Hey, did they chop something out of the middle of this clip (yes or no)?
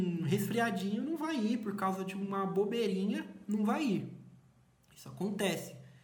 no